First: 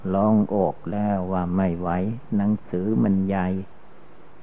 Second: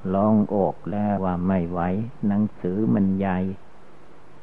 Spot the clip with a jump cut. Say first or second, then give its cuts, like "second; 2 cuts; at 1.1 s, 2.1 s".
second; 1 cut; at 1.2 s